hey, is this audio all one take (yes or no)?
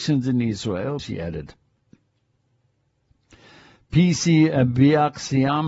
no